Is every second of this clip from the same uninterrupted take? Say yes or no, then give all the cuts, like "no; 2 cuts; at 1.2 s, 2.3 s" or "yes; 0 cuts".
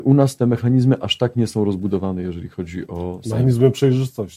yes; 0 cuts